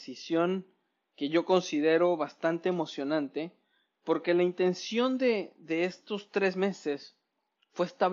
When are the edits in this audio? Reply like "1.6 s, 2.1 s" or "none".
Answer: none